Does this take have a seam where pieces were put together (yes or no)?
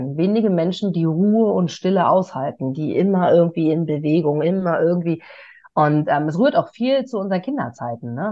no